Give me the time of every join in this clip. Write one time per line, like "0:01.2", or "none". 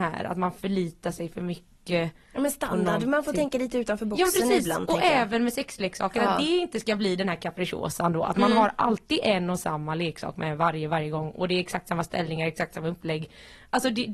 none